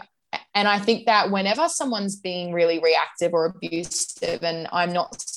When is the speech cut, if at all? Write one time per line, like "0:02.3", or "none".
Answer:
none